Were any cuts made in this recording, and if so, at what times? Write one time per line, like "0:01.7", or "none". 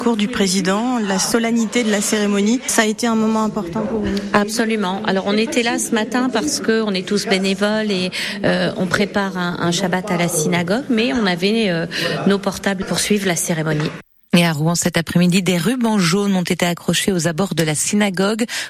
none